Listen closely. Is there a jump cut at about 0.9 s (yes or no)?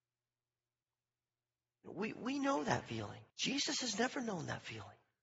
no